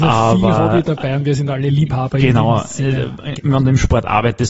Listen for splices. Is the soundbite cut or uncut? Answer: cut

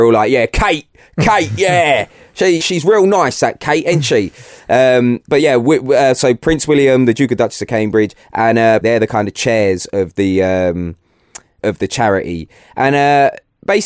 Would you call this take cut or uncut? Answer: cut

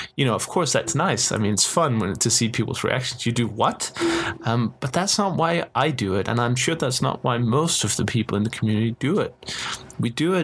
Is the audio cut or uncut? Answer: uncut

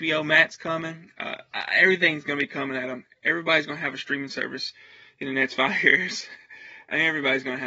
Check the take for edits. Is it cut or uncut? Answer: uncut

